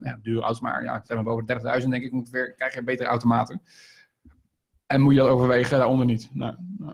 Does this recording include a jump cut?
no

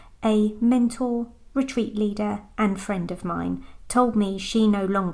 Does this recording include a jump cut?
no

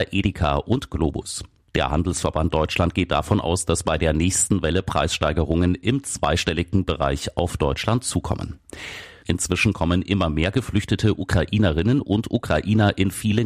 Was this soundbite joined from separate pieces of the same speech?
yes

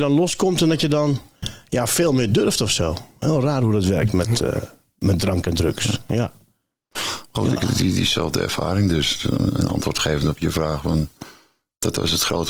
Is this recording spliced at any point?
no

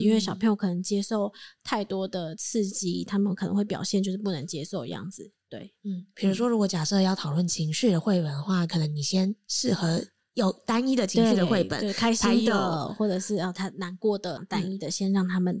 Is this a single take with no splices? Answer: no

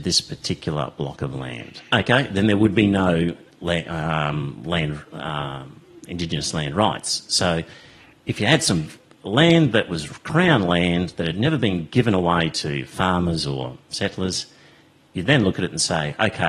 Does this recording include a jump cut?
yes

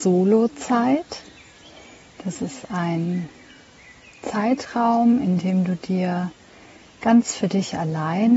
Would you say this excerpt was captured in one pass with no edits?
yes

